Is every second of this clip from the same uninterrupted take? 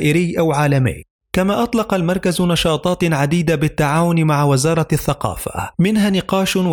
no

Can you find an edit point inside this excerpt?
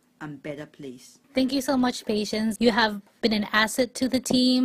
yes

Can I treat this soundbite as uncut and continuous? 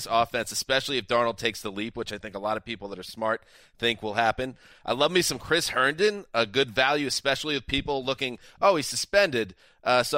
yes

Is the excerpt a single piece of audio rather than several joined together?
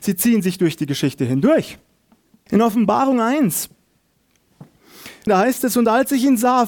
no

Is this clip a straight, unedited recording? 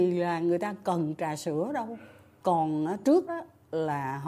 no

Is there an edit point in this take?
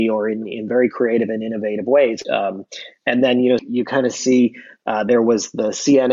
yes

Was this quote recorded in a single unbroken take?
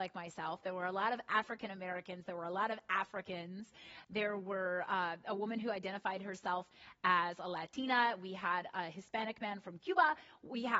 yes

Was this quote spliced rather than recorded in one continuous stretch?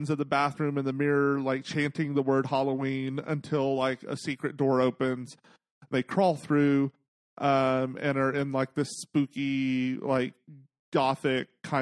no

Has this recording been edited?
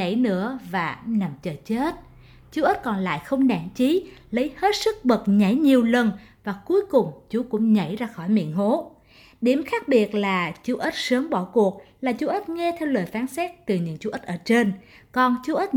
no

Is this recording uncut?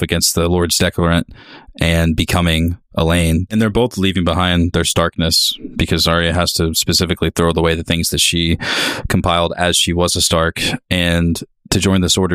no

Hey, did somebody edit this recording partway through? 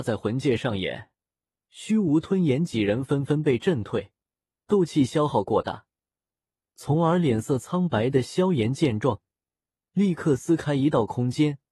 no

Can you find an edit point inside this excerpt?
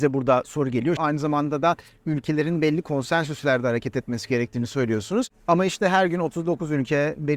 yes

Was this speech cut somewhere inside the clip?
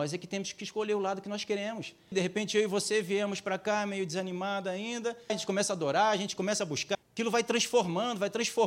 yes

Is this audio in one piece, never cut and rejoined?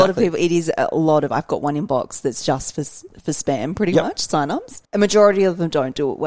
no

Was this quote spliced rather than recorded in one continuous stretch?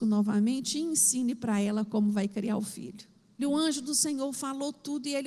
yes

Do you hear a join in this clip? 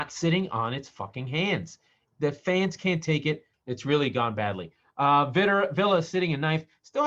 yes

